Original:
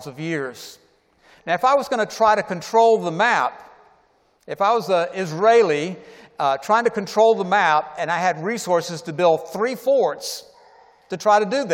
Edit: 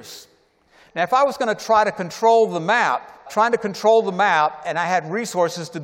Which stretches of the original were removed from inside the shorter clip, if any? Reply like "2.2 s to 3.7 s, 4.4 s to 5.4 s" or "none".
3.8 s to 6.6 s